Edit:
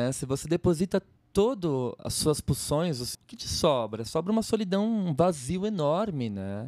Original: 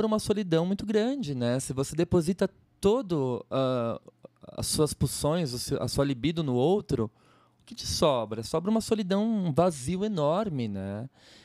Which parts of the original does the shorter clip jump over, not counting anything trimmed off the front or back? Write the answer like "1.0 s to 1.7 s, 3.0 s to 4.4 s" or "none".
3.5 s to 4.5 s, 5.7 s to 7.5 s